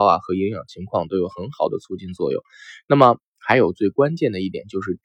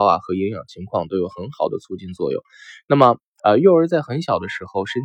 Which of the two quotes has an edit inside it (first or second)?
second